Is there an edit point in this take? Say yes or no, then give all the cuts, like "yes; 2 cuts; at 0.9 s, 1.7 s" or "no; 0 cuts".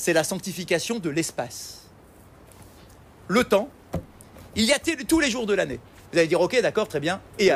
yes; 1 cut; at 6.0 s